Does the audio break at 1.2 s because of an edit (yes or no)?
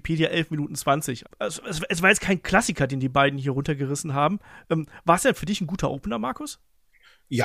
yes